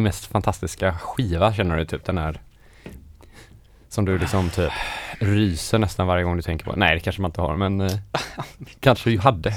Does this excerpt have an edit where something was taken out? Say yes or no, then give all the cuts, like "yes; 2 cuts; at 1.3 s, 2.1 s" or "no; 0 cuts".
no; 0 cuts